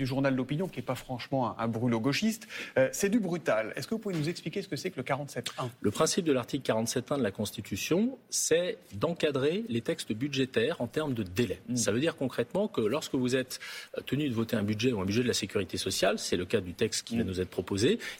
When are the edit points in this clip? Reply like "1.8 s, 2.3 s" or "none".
none